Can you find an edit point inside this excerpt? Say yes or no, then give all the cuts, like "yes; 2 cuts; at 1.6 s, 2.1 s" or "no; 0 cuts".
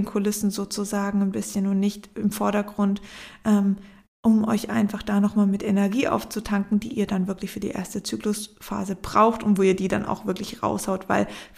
no; 0 cuts